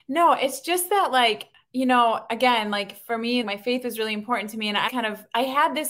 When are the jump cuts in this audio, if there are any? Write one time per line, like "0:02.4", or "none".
0:03.4
0:04.9